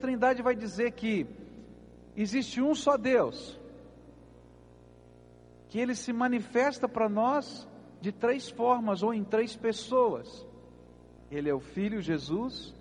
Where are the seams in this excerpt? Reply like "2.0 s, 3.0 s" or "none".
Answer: 11.2 s